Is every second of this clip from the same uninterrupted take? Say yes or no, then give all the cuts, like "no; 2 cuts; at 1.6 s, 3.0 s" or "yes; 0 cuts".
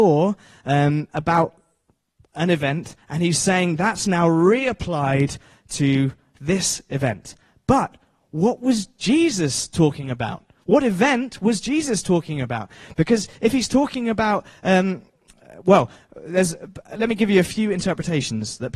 yes; 0 cuts